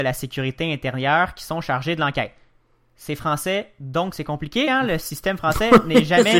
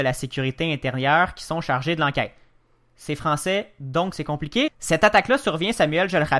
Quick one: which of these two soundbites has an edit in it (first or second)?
second